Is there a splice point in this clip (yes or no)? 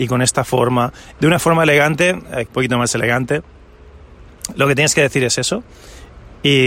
yes